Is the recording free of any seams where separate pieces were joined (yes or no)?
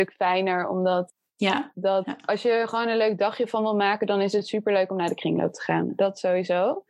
no